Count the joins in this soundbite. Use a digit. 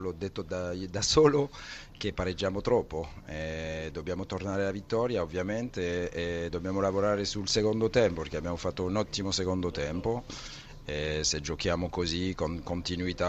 0